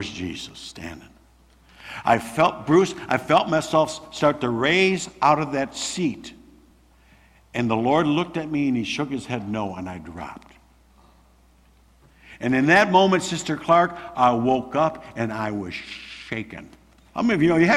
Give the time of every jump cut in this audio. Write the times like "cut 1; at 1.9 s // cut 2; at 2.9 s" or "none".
none